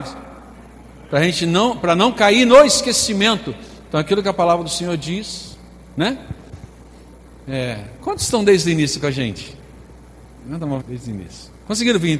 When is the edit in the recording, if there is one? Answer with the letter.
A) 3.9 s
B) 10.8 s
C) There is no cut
B